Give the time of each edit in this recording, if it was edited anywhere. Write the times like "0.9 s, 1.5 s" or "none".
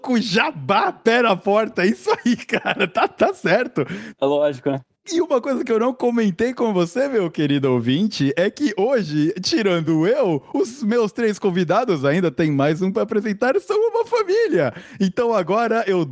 none